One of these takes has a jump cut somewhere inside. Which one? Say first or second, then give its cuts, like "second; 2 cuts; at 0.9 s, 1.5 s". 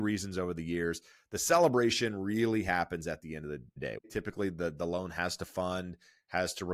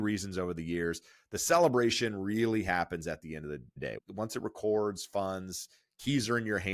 first; 1 cut; at 4.0 s